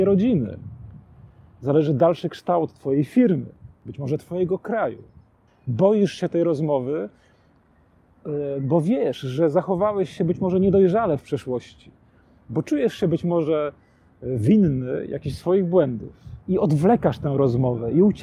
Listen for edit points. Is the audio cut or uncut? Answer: cut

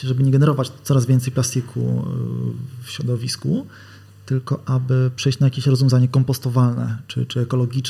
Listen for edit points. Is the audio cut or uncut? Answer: uncut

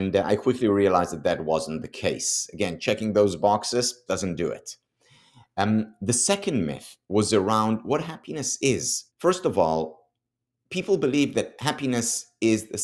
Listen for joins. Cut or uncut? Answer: cut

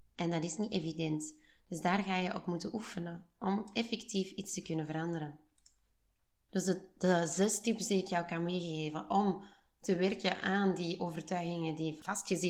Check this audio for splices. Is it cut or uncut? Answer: uncut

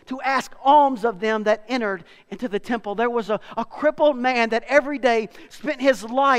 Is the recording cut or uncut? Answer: uncut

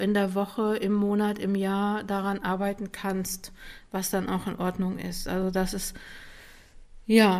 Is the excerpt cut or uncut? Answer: uncut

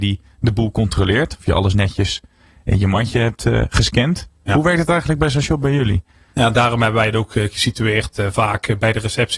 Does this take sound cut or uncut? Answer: uncut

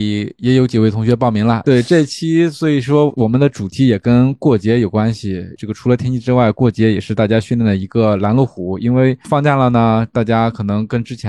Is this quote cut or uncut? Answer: cut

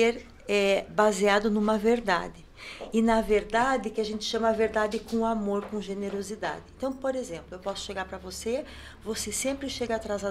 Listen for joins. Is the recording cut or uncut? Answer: uncut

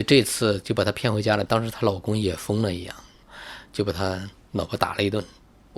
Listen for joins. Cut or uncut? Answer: cut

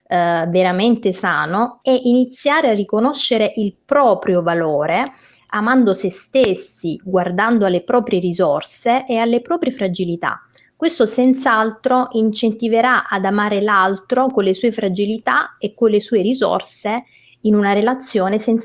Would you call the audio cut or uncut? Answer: uncut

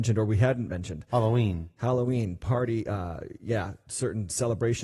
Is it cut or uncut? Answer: uncut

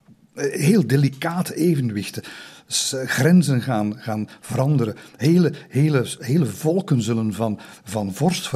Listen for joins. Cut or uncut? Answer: uncut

